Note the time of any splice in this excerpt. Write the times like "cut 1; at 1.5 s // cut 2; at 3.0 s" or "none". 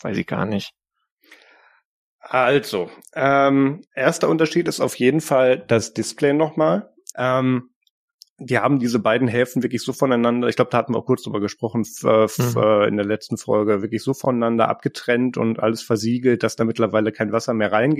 cut 1; at 3.9 s // cut 2; at 7.1 s

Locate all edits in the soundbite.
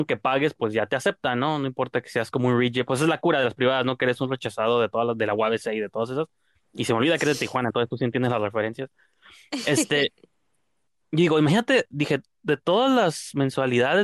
none

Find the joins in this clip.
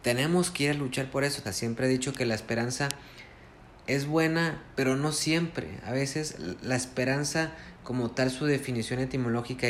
cut 1; at 1.4 s

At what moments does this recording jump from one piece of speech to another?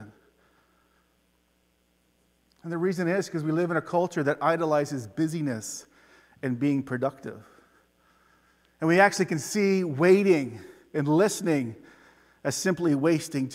none

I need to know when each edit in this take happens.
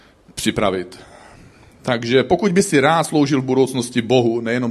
none

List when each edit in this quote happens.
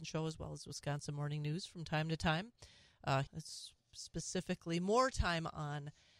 cut 1; at 3.3 s

